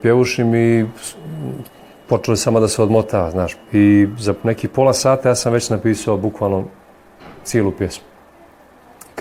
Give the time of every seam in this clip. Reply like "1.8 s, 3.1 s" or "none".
none

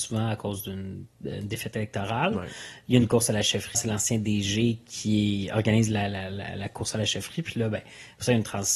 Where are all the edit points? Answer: 3.7 s

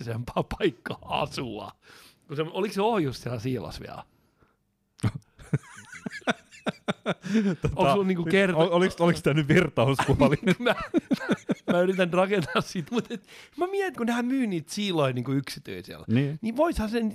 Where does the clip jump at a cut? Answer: 12.9 s, 14.0 s

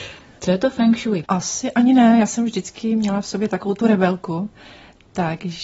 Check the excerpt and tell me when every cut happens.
1.2 s

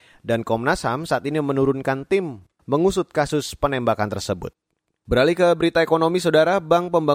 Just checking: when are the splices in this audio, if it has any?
none

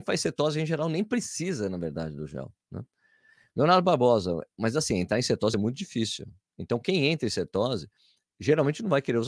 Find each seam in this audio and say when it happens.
none

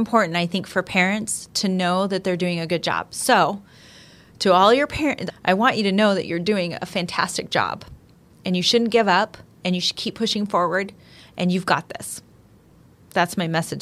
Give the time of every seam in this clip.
5.3 s

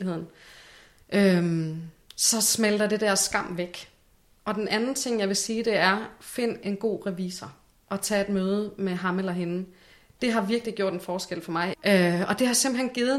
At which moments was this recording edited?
11.7 s

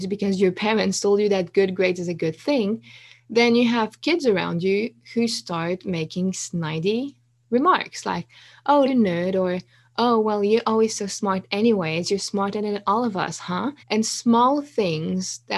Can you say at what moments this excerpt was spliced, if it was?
8.9 s, 13.8 s

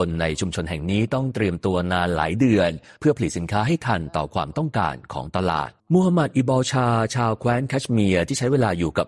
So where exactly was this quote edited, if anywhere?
5.8 s

